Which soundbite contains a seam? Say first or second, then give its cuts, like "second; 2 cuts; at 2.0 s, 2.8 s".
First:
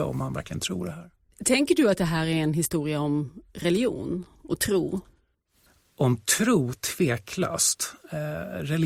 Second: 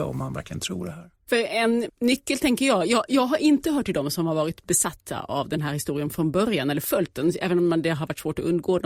second; 2 cuts; at 1.3 s, 3.1 s